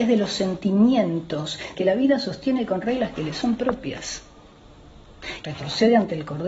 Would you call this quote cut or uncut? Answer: cut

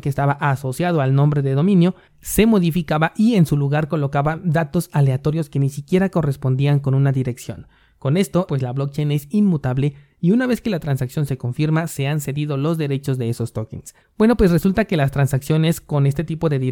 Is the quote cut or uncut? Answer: cut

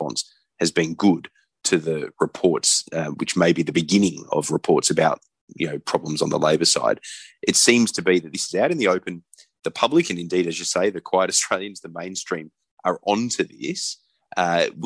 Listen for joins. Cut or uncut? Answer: uncut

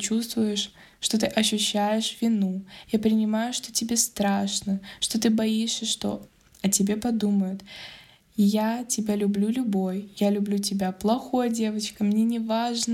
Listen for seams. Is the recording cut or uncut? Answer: uncut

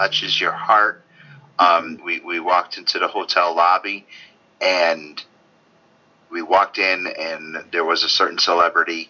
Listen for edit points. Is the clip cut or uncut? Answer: cut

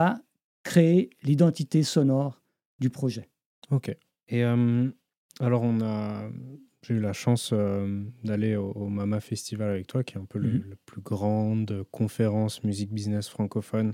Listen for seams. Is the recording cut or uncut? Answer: uncut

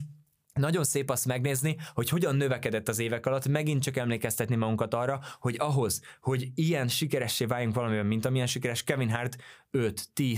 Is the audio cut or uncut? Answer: uncut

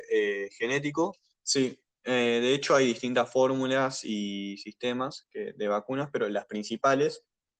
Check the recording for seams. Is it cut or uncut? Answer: cut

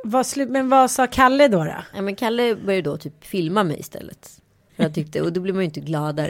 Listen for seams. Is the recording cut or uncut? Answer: cut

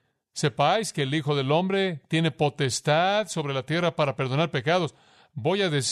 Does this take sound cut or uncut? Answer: uncut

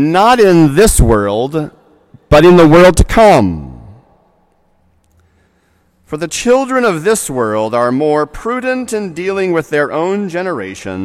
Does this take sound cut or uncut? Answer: uncut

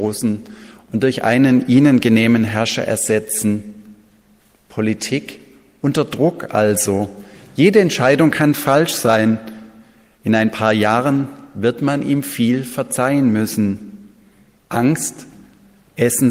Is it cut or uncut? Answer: cut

